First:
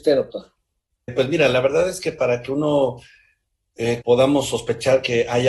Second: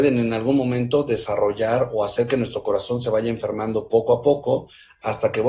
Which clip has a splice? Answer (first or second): first